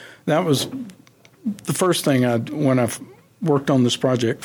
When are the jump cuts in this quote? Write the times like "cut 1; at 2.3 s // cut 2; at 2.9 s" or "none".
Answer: none